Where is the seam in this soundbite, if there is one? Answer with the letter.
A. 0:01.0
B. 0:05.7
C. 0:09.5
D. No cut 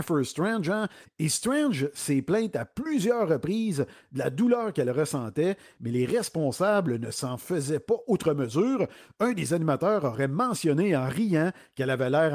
A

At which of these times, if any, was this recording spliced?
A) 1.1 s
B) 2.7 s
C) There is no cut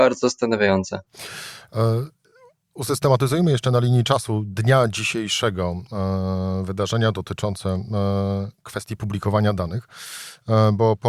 A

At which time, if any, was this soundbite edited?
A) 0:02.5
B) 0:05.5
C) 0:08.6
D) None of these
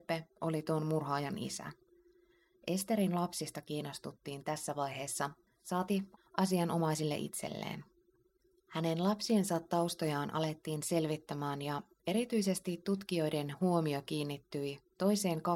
B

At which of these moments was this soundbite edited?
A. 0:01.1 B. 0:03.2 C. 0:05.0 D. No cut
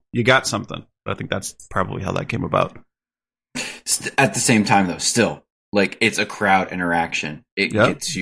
A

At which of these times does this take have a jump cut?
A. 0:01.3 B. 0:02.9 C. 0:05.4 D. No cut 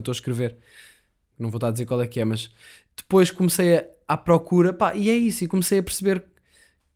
A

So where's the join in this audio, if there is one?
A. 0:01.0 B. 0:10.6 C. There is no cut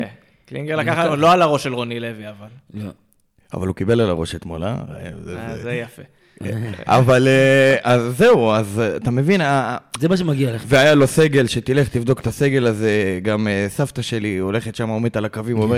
B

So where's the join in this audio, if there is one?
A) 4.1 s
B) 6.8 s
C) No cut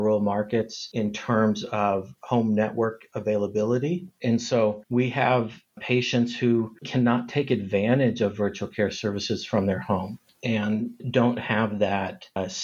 B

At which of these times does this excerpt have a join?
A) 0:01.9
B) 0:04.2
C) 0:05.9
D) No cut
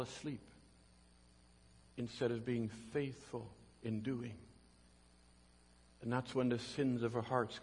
C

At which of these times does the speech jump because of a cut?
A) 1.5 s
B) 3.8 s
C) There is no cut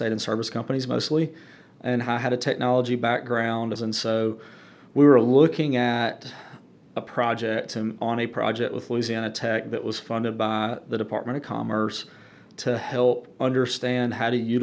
B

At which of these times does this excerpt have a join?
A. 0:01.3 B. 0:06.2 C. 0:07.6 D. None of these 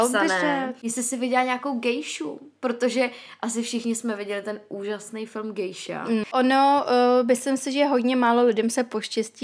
B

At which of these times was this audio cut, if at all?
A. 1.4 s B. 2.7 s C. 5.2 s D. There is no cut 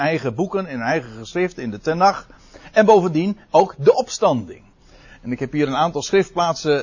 D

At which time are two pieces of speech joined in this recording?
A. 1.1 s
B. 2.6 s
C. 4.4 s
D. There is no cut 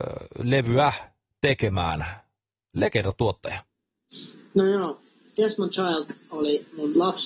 D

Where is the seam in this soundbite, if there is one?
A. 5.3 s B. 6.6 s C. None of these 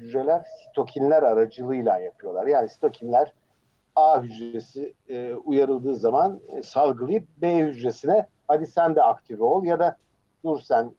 B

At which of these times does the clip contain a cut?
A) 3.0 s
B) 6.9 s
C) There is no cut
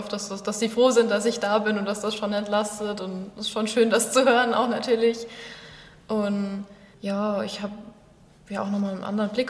B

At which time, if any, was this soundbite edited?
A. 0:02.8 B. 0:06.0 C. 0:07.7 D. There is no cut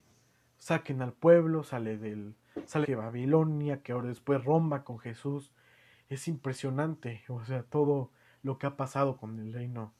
A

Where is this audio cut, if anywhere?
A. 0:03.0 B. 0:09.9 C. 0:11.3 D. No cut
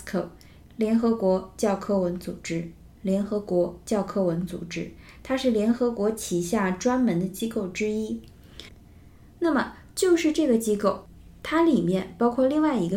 A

